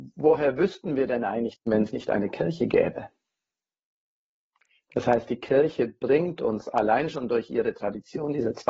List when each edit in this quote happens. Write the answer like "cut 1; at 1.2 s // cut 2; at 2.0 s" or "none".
cut 1; at 1.6 s

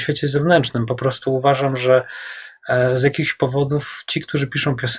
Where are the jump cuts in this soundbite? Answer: none

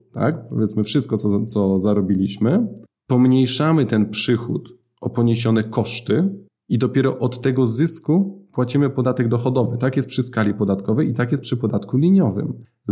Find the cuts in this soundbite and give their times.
none

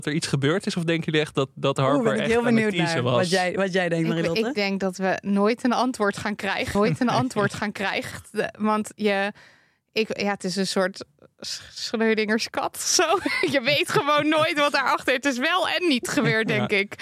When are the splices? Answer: none

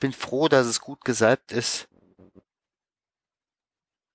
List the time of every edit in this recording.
none

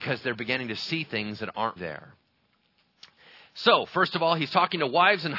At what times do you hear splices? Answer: cut 1; at 1.8 s

